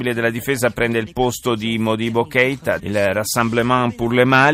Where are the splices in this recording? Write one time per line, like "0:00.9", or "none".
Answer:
0:02.8